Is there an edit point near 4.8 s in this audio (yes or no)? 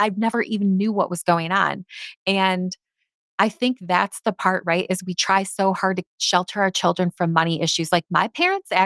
no